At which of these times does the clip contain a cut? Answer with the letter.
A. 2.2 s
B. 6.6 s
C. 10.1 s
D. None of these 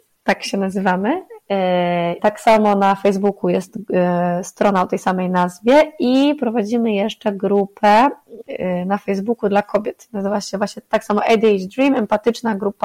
A